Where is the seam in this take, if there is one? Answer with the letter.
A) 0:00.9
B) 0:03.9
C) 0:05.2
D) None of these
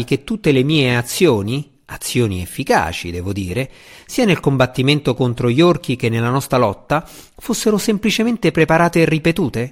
D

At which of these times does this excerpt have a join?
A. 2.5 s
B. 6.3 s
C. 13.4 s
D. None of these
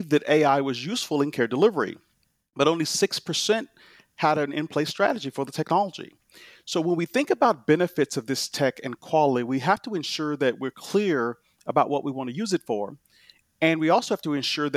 D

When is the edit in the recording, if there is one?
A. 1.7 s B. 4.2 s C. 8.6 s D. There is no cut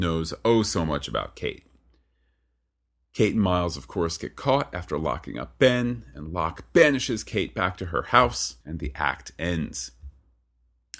C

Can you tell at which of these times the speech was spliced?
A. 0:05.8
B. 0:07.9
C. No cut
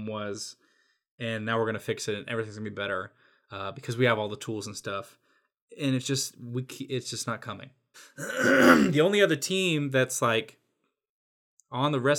B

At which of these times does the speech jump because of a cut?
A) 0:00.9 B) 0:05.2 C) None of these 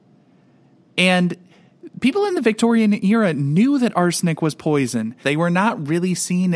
B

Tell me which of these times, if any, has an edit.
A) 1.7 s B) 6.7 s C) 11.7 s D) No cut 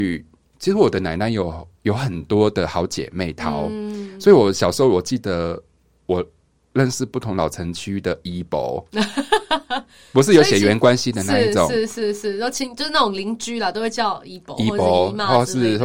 A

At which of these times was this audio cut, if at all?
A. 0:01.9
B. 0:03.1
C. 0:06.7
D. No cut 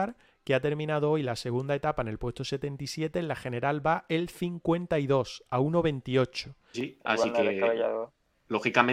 C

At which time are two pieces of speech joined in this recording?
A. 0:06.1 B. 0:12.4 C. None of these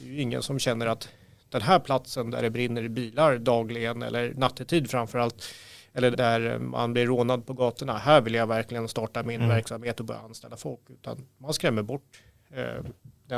A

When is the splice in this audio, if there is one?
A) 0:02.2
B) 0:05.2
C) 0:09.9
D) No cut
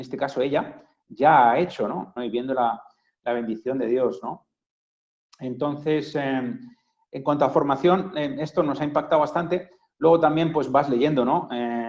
A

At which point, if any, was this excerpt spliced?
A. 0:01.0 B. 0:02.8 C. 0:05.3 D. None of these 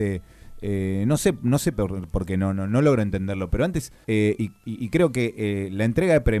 D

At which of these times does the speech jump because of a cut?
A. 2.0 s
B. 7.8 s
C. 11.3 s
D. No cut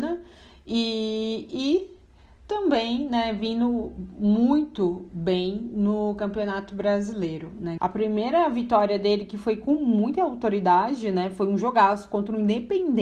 B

